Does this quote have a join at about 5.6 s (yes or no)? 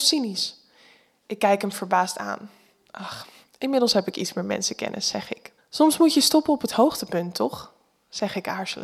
yes